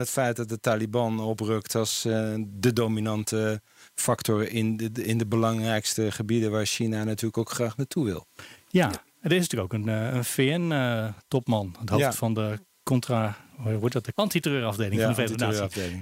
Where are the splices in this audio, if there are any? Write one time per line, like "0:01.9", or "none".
none